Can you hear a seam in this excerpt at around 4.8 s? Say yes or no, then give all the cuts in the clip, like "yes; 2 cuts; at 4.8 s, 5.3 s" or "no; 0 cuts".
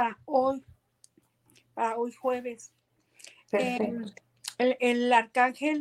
no; 0 cuts